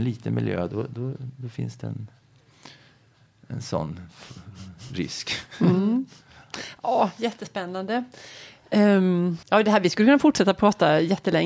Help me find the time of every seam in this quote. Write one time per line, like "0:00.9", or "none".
0:09.4